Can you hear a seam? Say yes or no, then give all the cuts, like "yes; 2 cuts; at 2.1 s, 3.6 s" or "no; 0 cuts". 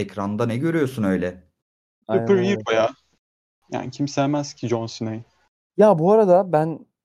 no; 0 cuts